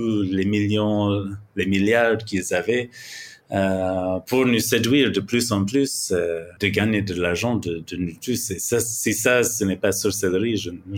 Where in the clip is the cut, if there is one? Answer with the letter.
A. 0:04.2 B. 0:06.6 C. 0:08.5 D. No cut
B